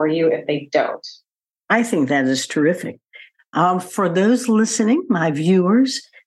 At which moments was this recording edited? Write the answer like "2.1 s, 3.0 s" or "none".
none